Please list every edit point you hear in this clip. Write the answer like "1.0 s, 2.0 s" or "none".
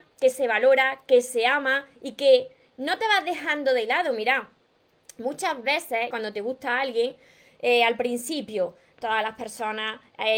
6.1 s